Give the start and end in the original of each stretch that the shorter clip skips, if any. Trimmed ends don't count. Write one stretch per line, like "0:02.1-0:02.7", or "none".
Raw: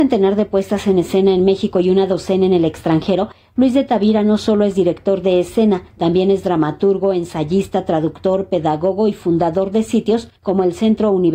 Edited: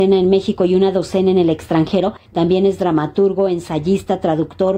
0:03.4-0:05.9

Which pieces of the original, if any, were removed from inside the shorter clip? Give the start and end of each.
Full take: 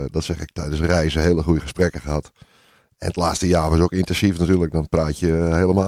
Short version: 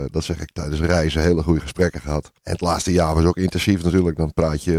0:02.4-0:02.9

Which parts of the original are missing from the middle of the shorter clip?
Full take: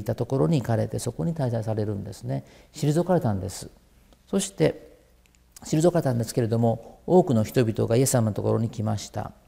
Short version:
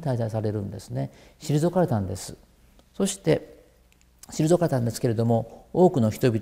none

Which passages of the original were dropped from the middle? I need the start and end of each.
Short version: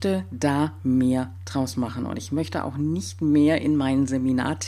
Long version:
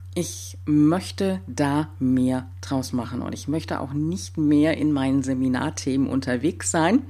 none

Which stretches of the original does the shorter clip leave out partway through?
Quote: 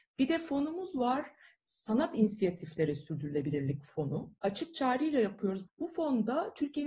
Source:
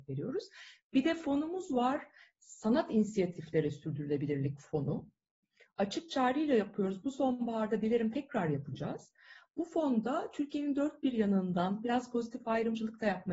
0:05.1-0:05.7
0:07.0-0:09.5

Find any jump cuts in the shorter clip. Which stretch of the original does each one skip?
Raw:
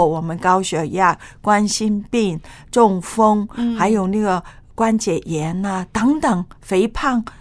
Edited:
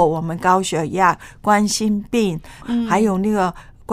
0:02.6-0:03.5

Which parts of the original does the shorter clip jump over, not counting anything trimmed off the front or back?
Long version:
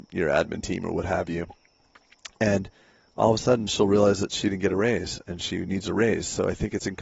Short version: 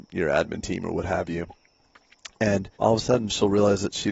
0:02.7-0:03.1

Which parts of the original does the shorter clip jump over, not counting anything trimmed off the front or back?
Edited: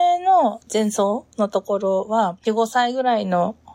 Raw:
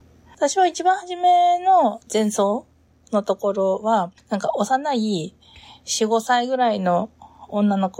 0:02.7-0:03.1
0:04.2-0:06.0

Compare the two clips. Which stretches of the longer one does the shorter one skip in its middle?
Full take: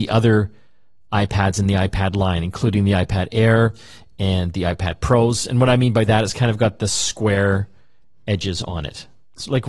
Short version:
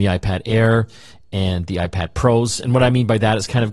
none

